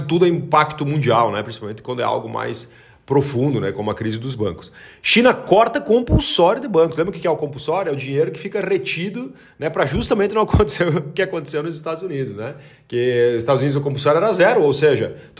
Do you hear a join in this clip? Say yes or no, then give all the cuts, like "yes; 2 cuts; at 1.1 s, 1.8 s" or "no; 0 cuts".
no; 0 cuts